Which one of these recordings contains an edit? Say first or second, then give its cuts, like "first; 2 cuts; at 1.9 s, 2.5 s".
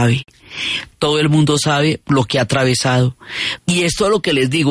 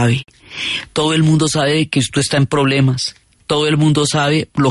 first; 2 cuts; at 0.9 s, 3.6 s